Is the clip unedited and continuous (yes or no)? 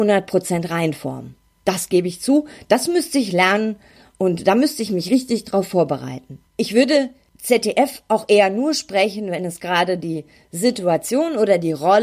no